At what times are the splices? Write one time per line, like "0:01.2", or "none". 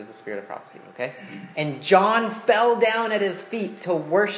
0:01.5